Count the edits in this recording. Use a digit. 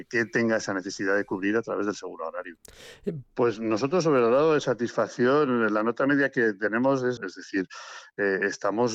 2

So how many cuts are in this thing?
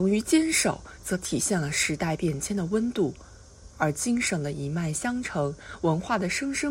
0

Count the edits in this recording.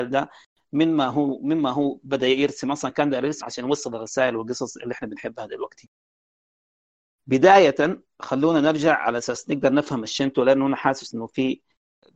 1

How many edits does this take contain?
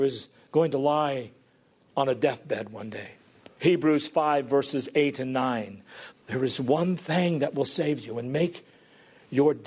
2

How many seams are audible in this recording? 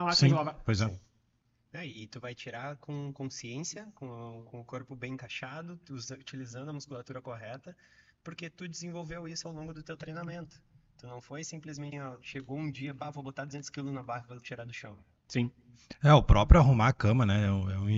2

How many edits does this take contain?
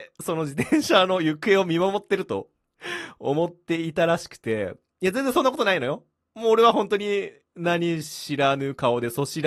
0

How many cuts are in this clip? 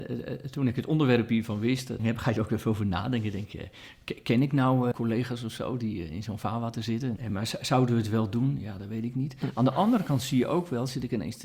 3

